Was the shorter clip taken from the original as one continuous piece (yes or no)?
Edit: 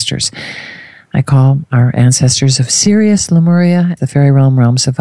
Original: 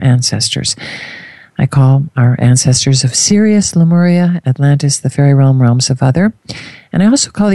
no